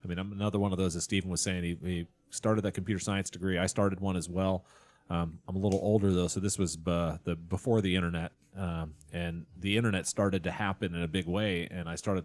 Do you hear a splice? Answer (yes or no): no